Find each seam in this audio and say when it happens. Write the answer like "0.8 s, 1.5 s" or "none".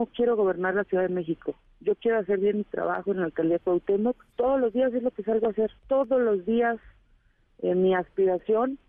4.3 s, 5.8 s